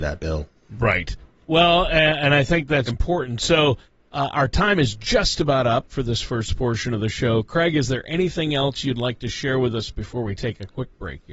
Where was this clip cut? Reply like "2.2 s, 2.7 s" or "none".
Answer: 2.9 s